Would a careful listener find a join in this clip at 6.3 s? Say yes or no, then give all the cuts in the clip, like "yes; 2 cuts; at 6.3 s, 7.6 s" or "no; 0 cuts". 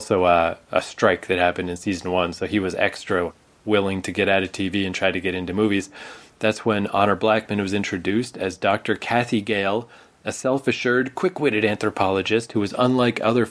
yes; 1 cut; at 6.3 s